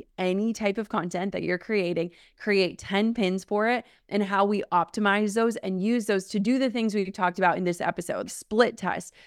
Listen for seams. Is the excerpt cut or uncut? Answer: cut